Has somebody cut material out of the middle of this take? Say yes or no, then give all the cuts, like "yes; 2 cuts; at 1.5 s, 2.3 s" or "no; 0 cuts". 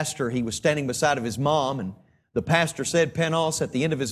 no; 0 cuts